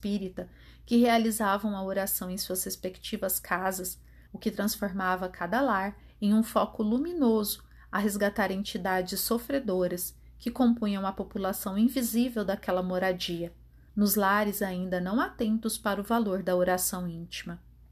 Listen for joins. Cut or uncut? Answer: cut